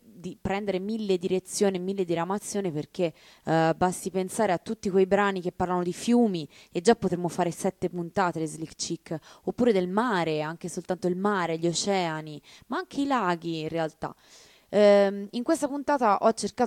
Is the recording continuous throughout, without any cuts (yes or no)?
yes